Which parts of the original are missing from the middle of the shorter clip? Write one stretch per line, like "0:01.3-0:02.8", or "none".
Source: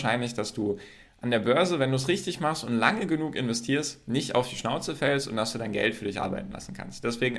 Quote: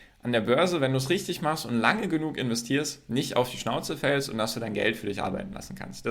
none